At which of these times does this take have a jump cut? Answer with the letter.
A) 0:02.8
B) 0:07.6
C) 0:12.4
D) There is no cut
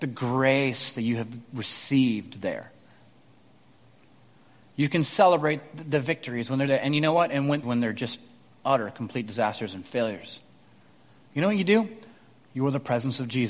B